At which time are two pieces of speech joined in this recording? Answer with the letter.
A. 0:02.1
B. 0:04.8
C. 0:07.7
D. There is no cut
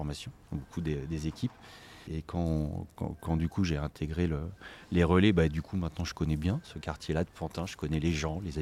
A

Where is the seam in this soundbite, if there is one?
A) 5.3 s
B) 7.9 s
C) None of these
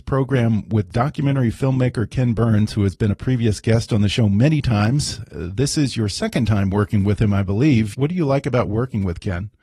B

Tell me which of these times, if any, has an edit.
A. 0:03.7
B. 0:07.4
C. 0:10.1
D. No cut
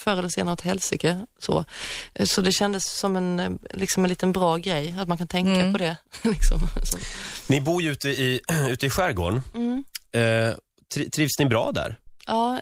D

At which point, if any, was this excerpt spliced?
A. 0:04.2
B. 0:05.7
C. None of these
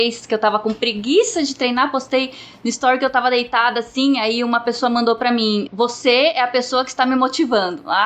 B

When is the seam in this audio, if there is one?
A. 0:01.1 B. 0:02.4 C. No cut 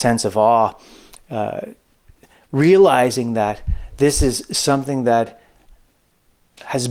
C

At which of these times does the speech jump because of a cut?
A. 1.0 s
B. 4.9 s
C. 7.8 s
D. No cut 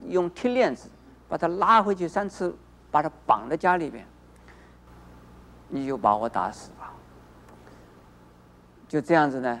B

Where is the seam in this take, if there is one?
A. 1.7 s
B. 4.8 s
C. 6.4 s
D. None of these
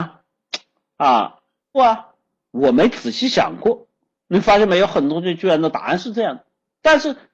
A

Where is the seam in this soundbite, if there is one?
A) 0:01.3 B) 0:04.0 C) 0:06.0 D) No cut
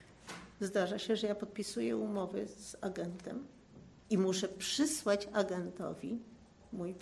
B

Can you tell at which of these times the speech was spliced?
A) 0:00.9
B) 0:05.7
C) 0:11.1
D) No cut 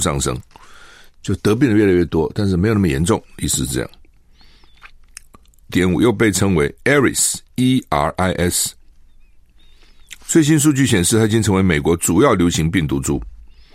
B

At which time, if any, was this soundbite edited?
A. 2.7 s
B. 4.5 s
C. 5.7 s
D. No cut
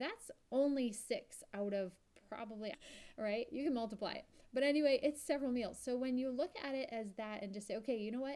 A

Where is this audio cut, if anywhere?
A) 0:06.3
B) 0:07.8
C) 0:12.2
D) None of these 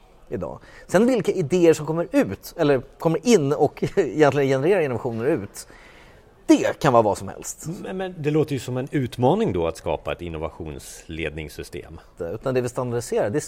C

